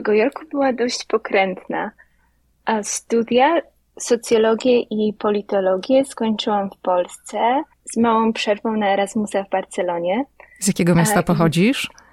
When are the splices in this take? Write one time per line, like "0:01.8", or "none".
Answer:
0:07.7